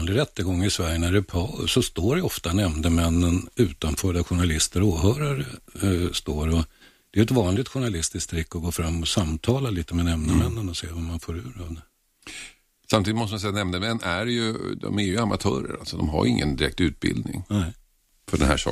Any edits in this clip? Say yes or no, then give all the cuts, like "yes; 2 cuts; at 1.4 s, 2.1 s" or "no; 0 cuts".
no; 0 cuts